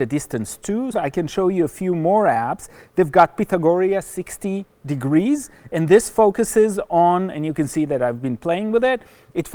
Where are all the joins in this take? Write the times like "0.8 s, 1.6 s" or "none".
0.9 s